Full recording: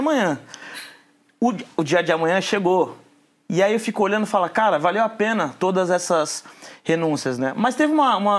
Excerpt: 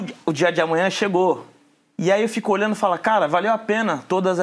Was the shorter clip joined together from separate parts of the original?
no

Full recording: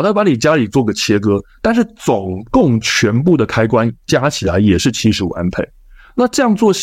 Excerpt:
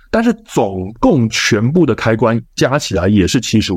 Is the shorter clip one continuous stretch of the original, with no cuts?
yes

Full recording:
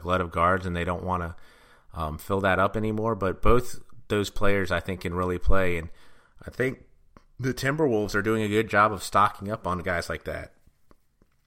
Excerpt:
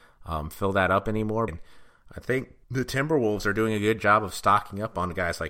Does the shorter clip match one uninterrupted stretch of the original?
no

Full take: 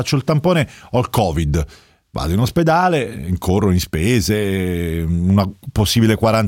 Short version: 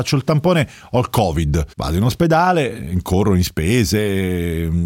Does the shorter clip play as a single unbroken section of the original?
no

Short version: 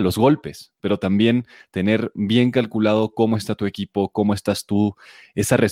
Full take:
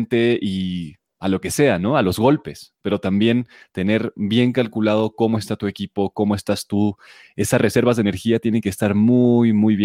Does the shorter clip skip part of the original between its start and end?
no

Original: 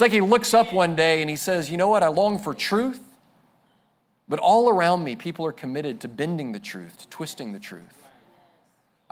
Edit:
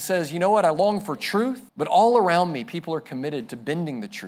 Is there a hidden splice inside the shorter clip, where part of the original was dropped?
yes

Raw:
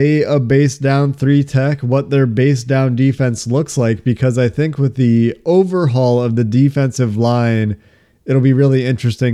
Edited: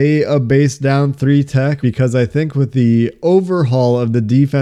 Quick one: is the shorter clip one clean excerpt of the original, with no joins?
no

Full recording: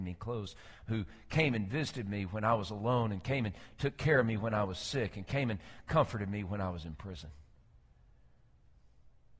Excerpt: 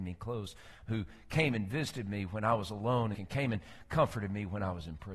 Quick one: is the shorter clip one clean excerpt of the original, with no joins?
no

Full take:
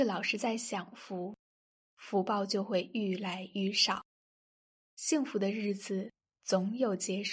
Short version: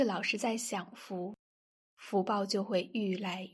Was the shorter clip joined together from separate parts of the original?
no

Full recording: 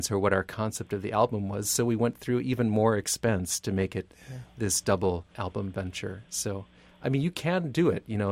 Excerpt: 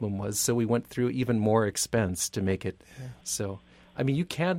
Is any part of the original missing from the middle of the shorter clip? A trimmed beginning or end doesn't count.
yes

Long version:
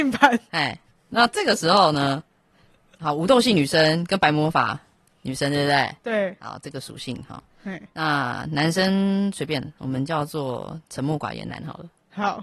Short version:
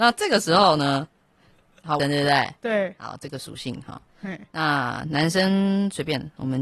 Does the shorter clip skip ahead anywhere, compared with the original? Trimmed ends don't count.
yes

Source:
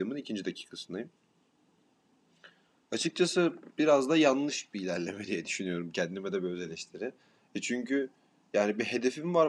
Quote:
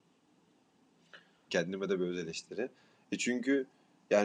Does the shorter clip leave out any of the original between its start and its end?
yes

